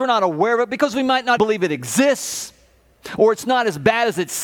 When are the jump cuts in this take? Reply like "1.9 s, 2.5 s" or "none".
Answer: 1.4 s